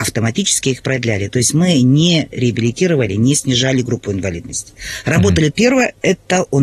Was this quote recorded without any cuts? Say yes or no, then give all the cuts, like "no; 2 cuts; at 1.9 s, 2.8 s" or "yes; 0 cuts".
no; 1 cut; at 5.5 s